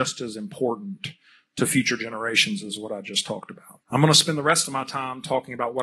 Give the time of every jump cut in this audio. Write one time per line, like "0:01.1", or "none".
0:03.8